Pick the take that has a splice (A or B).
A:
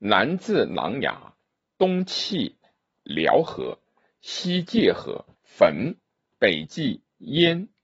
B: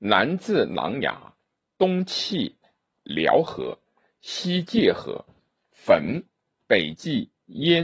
A